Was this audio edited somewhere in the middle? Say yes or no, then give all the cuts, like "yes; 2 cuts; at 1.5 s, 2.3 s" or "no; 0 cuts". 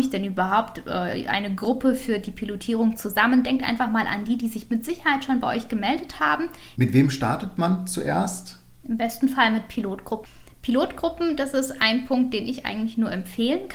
yes; 1 cut; at 6.7 s